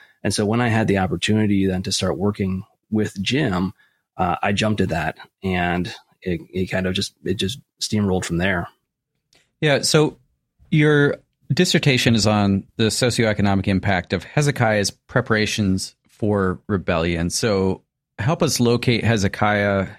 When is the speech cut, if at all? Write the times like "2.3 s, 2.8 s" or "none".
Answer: none

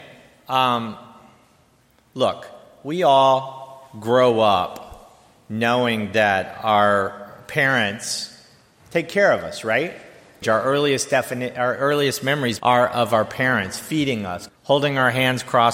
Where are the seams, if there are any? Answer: 10.4 s, 12.6 s, 14.5 s

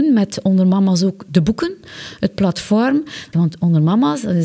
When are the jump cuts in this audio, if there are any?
3.3 s

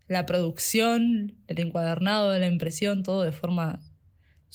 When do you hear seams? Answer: none

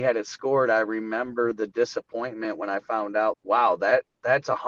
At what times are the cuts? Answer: 3.3 s

